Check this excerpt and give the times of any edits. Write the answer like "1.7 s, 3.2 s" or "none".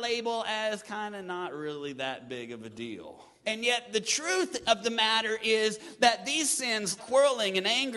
3.4 s, 7.0 s